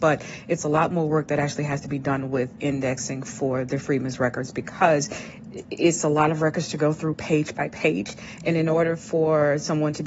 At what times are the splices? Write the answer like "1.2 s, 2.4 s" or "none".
none